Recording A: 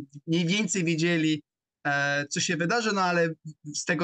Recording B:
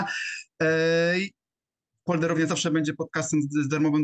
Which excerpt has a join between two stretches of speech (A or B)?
B